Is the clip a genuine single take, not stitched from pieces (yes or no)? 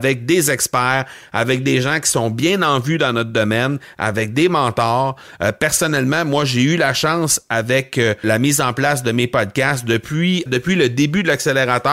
no